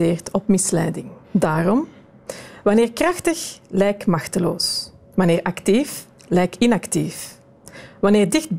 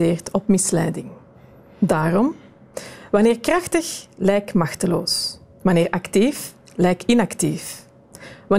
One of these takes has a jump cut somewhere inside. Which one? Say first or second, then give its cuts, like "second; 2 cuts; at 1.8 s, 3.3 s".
first; 1 cut; at 1.2 s